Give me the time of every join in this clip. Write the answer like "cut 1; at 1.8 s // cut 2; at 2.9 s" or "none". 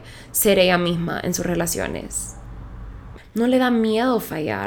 cut 1; at 3.2 s